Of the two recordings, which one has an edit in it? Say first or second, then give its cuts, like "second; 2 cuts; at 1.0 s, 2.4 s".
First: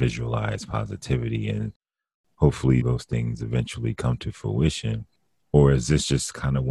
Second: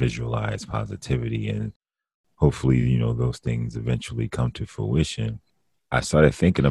first; 2 cuts; at 2.8 s, 5.4 s